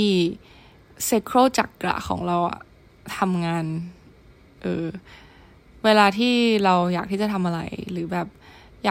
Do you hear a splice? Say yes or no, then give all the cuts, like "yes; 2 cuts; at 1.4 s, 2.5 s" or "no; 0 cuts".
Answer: no; 0 cuts